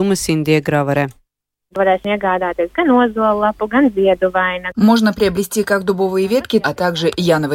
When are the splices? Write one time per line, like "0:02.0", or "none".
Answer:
0:06.6

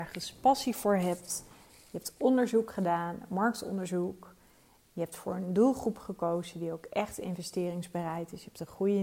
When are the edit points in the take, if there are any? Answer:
none

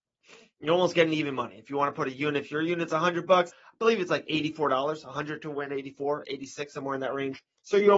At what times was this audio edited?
0:03.5
0:06.2

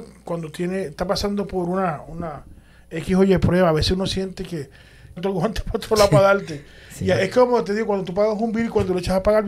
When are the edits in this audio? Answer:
0:05.2

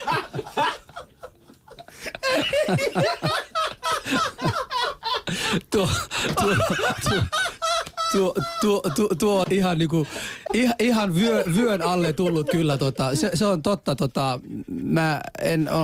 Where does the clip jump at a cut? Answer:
0:09.4
0:10.5

